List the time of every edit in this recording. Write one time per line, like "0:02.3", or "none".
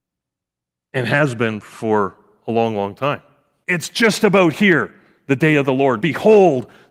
0:03.6
0:06.0